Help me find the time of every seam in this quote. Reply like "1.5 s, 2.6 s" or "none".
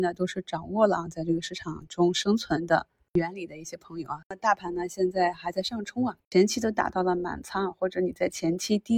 4.2 s, 6.2 s